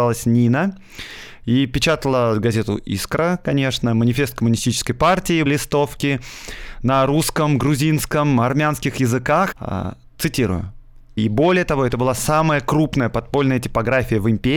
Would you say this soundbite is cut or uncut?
cut